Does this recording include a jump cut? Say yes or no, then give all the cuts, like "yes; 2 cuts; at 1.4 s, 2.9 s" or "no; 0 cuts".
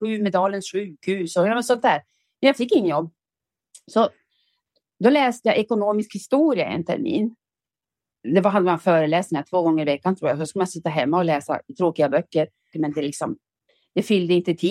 yes; 2 cuts; at 8.1 s, 12.7 s